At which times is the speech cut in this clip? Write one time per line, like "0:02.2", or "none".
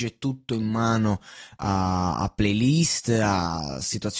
none